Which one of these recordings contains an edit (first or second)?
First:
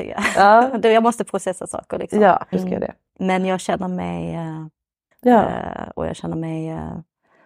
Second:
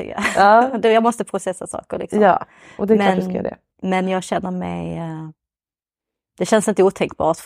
first